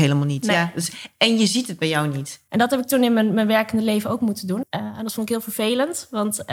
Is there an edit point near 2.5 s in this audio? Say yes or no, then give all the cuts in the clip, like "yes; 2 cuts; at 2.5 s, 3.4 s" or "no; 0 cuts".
yes; 2 cuts; at 2.5 s, 4.6 s